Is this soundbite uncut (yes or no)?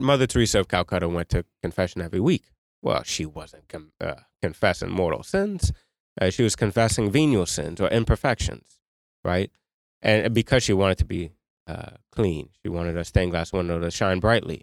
yes